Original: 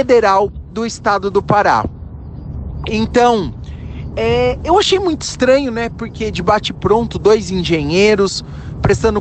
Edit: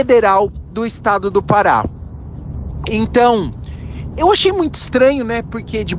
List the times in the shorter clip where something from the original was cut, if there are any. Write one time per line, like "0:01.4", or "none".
0:04.1